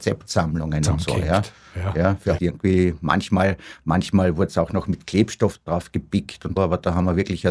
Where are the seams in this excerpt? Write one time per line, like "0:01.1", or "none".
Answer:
0:02.4
0:06.6